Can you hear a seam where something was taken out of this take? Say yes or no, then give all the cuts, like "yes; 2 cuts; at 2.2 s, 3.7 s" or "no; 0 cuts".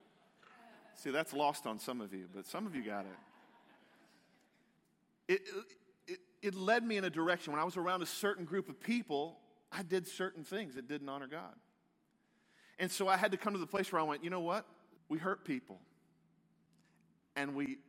yes; 1 cut; at 15.0 s